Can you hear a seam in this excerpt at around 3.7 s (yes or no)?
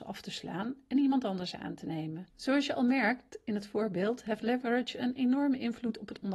no